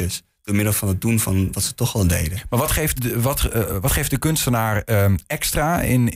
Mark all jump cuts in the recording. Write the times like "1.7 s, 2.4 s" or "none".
3.0 s